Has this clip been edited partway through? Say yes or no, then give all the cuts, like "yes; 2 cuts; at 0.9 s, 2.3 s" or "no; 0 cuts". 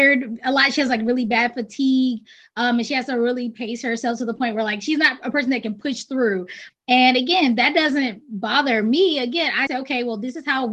yes; 2 cuts; at 6.7 s, 9.7 s